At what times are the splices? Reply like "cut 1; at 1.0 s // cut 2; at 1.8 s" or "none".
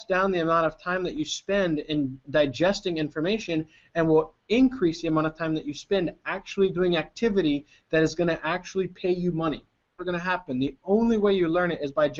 cut 1; at 2.2 s // cut 2; at 10.0 s